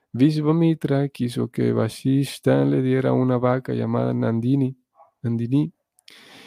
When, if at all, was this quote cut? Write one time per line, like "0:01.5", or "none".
none